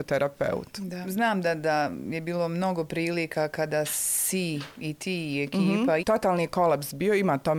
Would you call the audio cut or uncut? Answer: cut